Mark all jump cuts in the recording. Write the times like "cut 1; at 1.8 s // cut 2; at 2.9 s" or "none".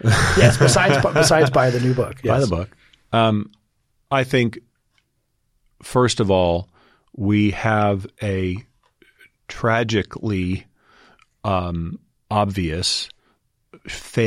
cut 1; at 12.1 s